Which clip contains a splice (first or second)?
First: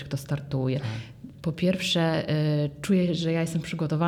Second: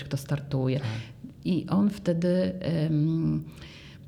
first